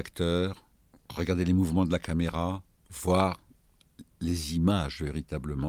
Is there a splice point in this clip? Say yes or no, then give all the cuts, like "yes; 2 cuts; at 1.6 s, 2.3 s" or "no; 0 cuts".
no; 0 cuts